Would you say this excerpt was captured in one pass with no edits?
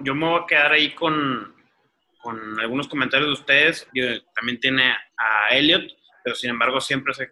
no; 2 cuts; at 3.9 s, 5.1 s

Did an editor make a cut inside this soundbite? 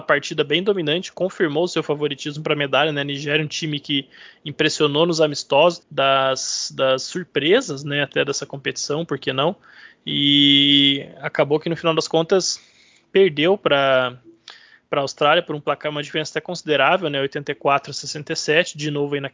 yes; 1 cut; at 5.8 s

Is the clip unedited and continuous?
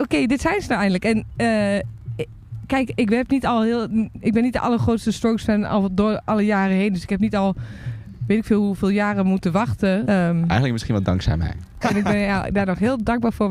no; 2 cuts; at 10.0 s, 11.8 s

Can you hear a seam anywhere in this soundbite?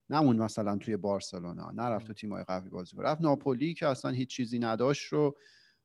no; 0 cuts

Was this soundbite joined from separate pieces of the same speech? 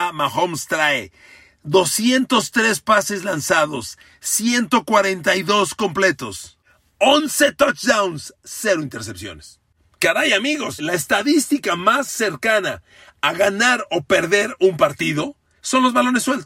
yes; 1 cut; at 10.8 s

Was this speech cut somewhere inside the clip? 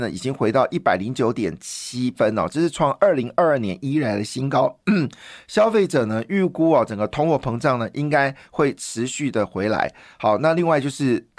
no; 0 cuts

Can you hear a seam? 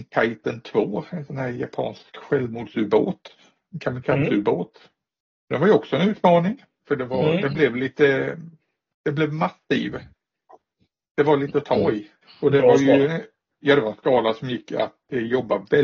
yes; 1 cut; at 6.8 s

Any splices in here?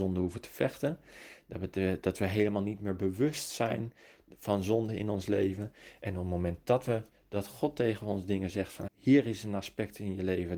yes; 1 cut; at 8.9 s

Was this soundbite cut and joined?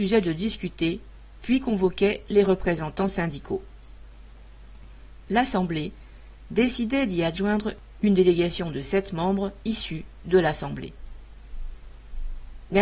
no; 0 cuts

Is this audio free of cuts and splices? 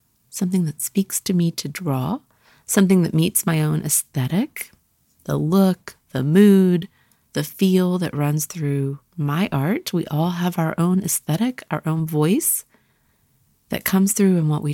yes; 0 cuts

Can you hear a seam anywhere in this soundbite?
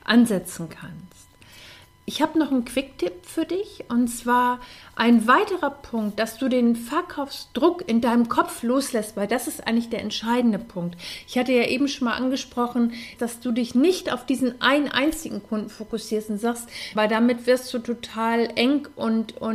yes; 2 cuts; at 13.2 s, 17.0 s

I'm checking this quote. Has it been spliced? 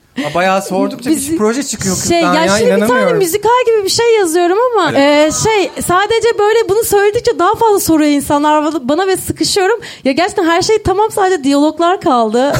yes; 1 cut; at 4.9 s

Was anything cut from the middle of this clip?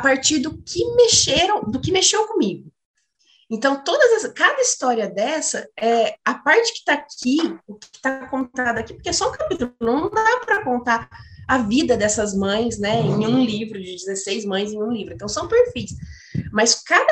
no; 0 cuts

